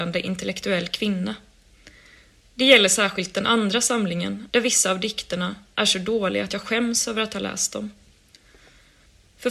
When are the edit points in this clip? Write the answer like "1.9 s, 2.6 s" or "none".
4.5 s